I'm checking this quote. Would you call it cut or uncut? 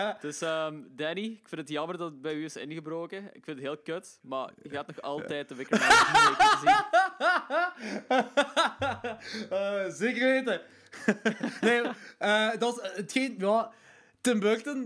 uncut